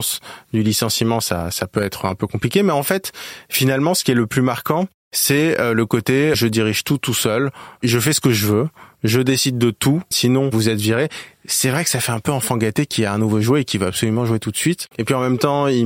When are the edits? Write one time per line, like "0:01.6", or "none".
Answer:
0:06.3
0:10.1
0:14.9